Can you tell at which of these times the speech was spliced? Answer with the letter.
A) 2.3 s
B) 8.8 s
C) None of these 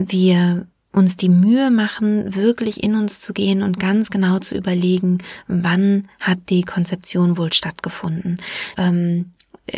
B